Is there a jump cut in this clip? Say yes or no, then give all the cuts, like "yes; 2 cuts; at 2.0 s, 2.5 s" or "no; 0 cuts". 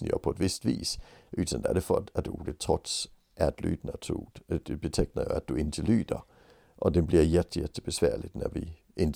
no; 0 cuts